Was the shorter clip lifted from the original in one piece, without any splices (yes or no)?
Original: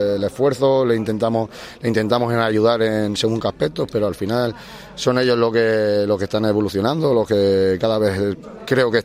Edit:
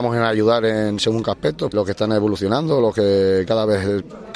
no